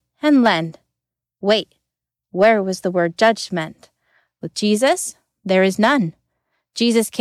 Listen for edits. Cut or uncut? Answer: cut